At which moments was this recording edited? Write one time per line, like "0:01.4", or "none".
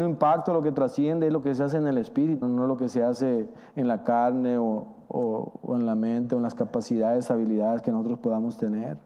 0:02.4